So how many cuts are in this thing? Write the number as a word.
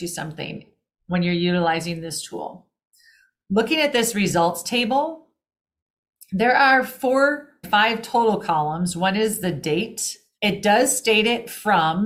two